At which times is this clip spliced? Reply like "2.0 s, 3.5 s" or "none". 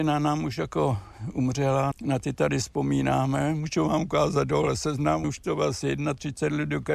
1.9 s, 5.2 s